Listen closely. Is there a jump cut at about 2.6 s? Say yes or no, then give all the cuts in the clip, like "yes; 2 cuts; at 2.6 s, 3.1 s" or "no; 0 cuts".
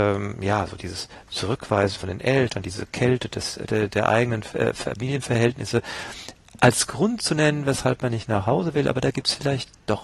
no; 0 cuts